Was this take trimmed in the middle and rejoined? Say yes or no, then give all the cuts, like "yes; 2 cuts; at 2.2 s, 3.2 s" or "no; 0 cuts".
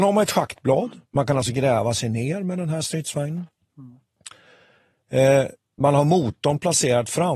yes; 1 cut; at 1.0 s